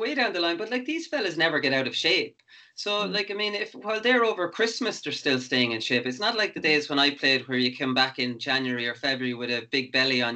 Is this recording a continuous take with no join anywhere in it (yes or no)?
yes